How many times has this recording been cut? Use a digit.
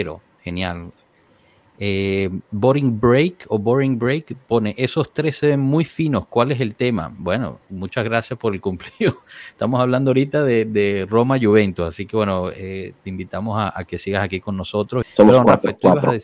1